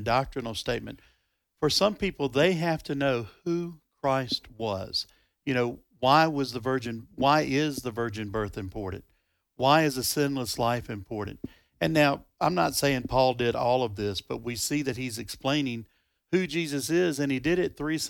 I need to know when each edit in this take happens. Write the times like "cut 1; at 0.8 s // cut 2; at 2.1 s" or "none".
none